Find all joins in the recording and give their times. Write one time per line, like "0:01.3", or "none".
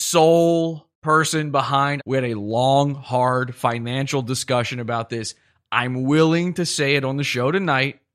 0:00.9
0:02.0